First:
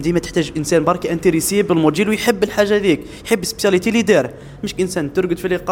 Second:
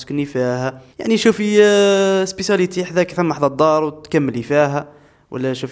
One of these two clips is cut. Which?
second; 1 cut; at 0.9 s

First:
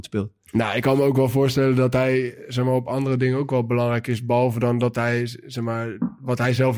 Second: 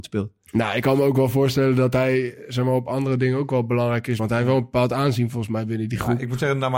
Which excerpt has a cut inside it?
second; 1 cut; at 4.2 s

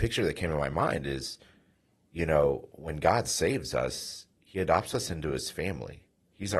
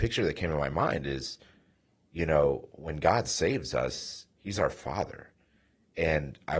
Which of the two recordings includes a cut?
second; 1 cut; at 4.3 s

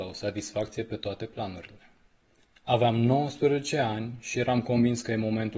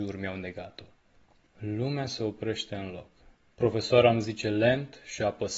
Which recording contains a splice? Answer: second; 1 cut; at 1.5 s

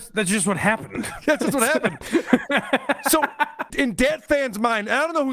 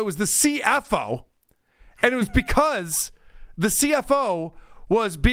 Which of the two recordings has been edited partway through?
first; 1 cut; at 3.7 s

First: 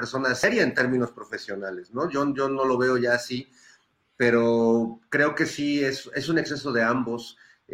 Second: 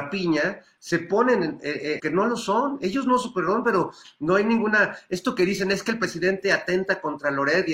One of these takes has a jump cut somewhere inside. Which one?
second; 1 cut; at 2.0 s

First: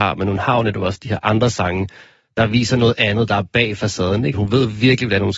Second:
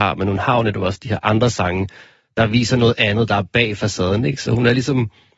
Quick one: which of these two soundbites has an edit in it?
first; 1 cut; at 4.3 s

